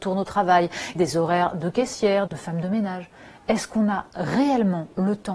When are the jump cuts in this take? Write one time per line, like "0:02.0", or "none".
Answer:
0:00.9
0:02.3